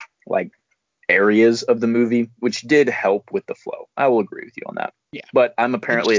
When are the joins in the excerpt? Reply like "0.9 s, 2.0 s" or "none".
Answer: none